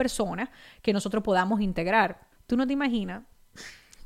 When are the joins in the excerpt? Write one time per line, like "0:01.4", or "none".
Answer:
0:02.3